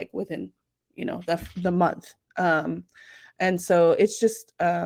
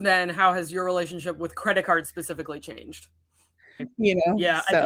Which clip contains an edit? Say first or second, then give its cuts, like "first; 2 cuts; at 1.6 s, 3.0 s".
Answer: second; 1 cut; at 3.8 s